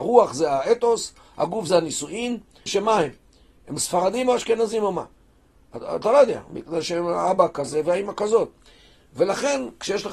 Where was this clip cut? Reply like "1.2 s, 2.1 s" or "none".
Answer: 2.7 s

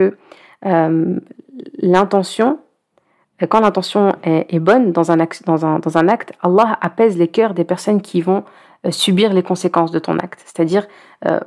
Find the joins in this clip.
none

